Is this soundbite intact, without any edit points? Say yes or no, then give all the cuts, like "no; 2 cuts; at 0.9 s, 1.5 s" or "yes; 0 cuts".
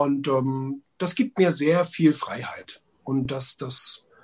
yes; 0 cuts